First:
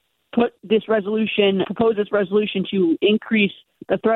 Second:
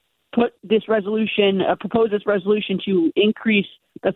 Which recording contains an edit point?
first; 1 cut; at 1.6 s

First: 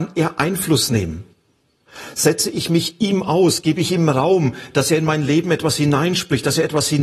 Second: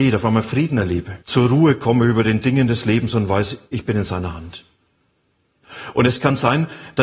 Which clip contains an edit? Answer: second; 1 cut; at 1.2 s

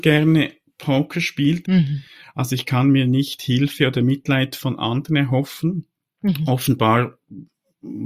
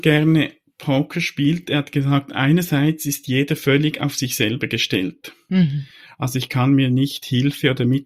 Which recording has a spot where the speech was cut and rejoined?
first; 1 cut; at 1.6 s

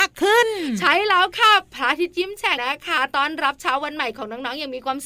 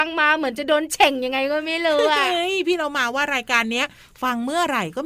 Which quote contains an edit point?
first; 1 cut; at 2.6 s

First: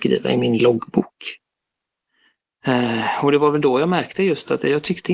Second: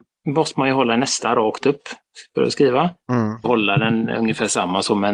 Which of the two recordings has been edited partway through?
second; 1 cut; at 3.4 s

